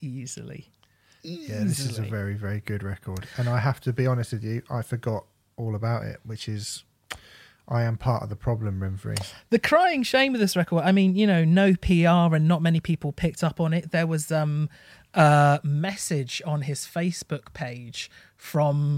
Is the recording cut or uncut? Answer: uncut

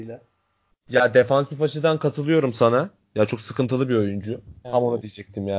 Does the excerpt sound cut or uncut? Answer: cut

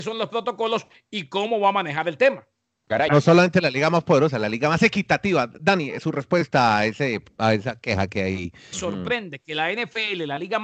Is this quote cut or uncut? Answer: cut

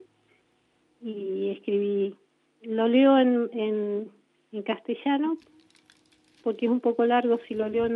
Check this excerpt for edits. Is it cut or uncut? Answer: uncut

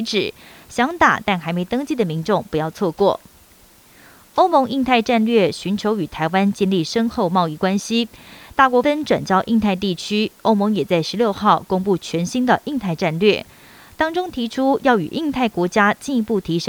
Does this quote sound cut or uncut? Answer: cut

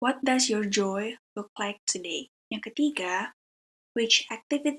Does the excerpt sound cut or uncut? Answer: cut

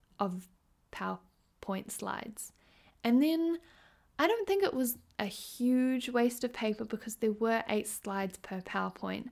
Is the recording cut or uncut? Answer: cut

